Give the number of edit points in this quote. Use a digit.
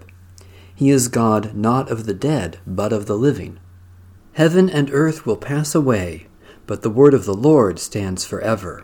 1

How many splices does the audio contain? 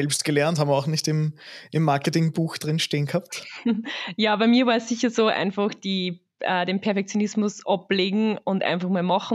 0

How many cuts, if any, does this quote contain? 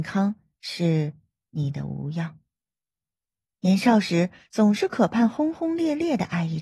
1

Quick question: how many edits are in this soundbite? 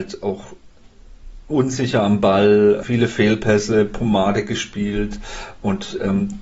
1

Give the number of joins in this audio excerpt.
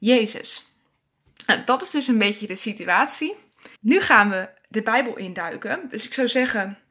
1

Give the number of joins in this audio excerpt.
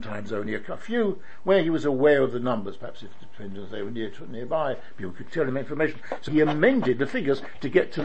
1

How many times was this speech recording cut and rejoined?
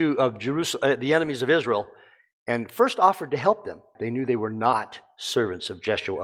1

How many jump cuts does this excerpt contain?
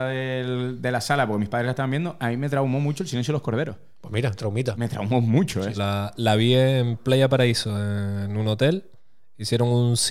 1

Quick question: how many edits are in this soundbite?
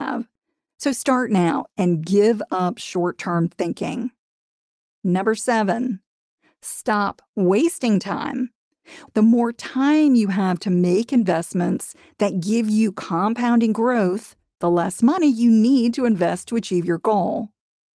2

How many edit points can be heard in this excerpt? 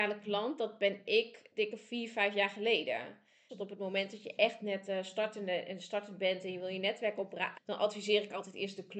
2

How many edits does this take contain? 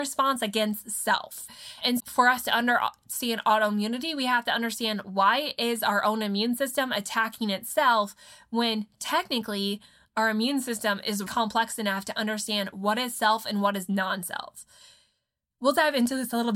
2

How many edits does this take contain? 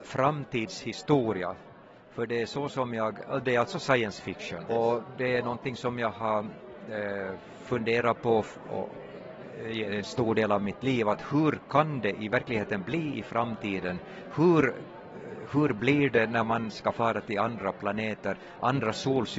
1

